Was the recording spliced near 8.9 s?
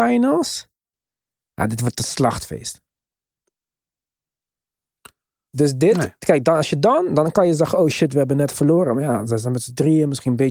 no; 1 cut; at 5.5 s

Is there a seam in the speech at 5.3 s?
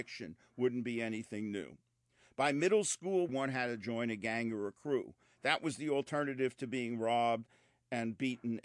no; 1 cut; at 3.3 s

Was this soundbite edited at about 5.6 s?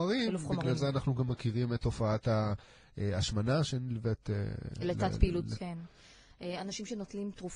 yes; 1 cut; at 5.6 s

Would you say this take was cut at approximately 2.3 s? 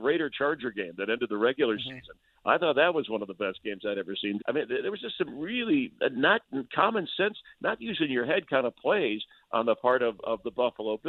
no; 1 cut; at 4.4 s

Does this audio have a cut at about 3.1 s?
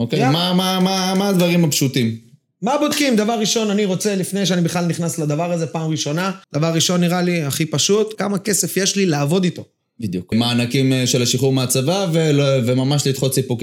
no; 3 cuts; at 6.4 s, 8.1 s, 10.3 s

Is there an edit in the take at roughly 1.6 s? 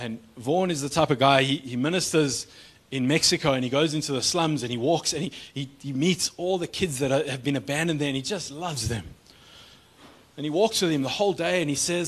no; 0 cuts

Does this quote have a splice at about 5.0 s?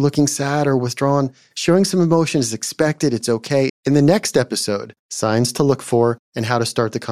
yes; 2 cuts; at 3.7 s, 5.0 s

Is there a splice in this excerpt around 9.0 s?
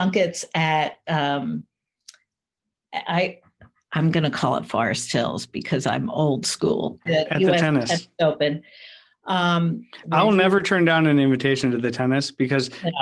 no; 1 cut; at 7.1 s

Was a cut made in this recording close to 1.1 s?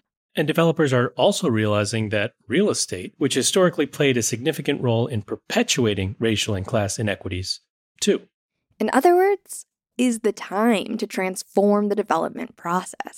no; 2 cuts; at 8.0 s, 9.9 s

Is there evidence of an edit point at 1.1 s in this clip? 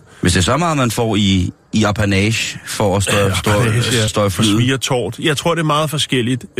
no; 1 cut; at 4.1 s

